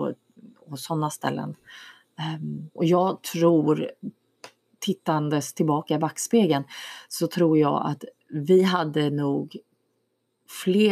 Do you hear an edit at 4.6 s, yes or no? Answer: no